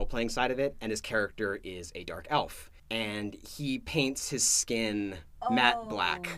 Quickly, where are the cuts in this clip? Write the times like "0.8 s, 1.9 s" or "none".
none